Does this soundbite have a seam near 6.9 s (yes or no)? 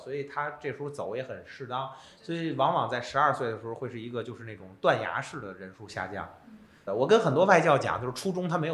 yes